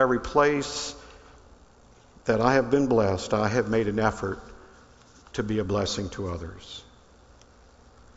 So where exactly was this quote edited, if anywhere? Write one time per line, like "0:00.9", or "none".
none